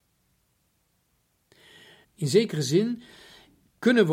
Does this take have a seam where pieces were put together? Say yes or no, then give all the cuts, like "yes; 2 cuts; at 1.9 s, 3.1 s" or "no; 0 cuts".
yes; 1 cut; at 2.0 s